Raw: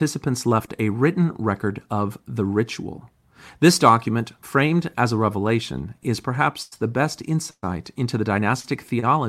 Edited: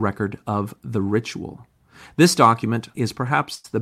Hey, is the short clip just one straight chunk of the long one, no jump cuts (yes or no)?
no